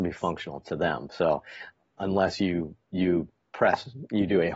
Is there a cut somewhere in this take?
no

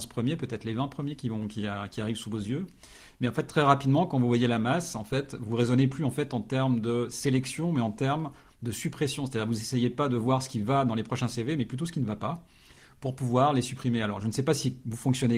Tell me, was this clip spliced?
no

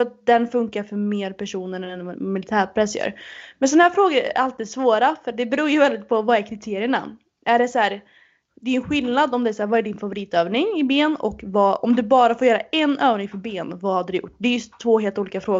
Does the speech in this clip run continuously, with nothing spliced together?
yes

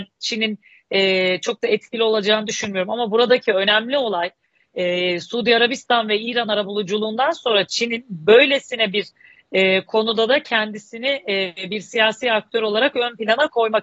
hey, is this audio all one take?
yes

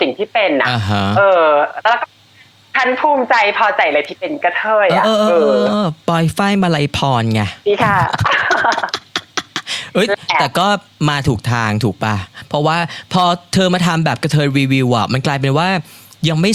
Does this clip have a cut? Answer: yes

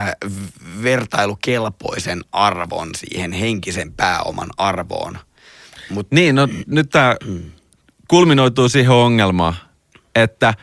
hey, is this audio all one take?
yes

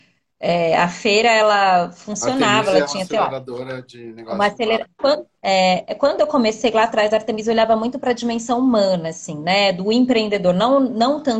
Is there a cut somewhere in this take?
yes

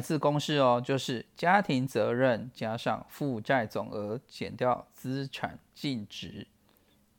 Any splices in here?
no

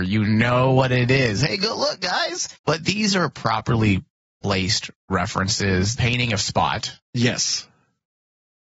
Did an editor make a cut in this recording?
yes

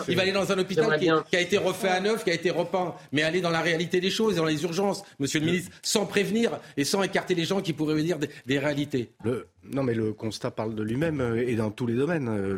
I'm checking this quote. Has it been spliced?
no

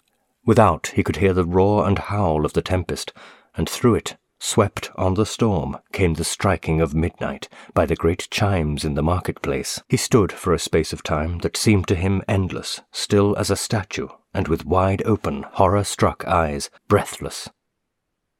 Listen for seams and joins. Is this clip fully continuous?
no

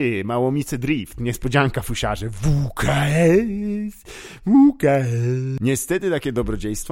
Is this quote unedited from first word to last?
yes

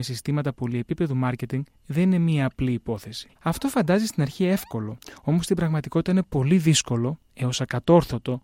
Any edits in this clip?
yes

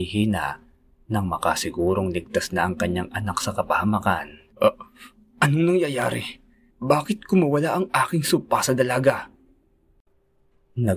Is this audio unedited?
no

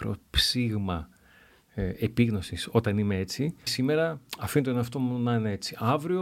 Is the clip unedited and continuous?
no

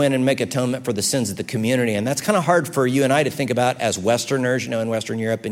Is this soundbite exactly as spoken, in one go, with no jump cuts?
yes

